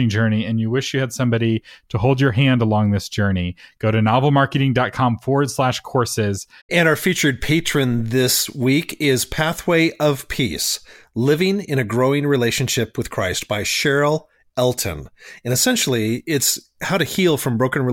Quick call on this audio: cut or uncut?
cut